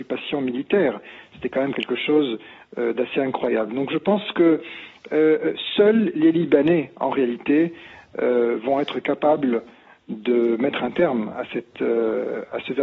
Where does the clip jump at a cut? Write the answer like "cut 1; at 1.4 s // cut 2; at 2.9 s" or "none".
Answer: none

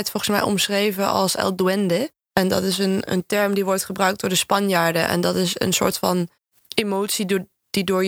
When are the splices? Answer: cut 1; at 3.1 s

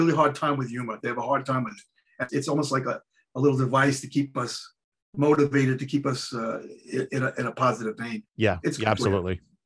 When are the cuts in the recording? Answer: cut 1; at 2.3 s // cut 2; at 8.3 s

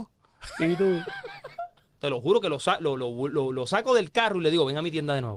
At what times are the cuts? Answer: cut 1; at 2.0 s

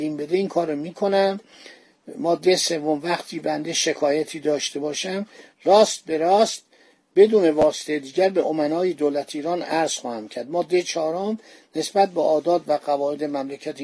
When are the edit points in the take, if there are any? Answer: none

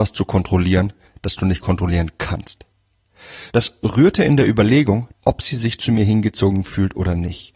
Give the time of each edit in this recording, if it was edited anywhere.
cut 1; at 3.5 s // cut 2; at 5.1 s

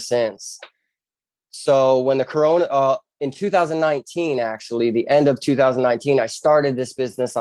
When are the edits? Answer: cut 1; at 1.3 s

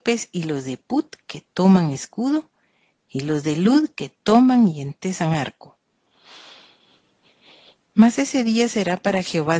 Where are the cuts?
none

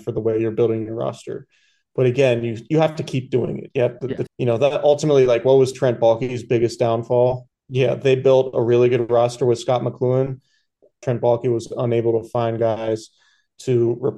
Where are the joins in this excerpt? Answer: cut 1; at 4.3 s // cut 2; at 7.5 s // cut 3; at 11.0 s

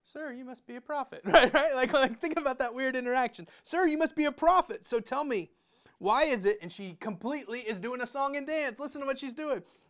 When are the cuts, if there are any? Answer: none

